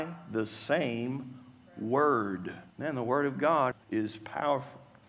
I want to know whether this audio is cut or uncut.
cut